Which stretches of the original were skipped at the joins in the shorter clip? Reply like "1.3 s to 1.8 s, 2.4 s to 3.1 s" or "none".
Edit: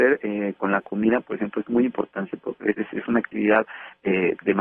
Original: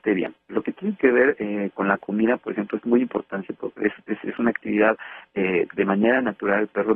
3.9 s to 4.0 s